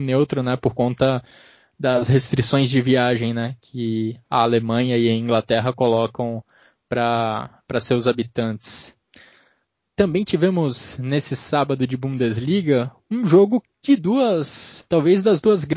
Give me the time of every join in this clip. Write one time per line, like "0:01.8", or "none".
0:14.9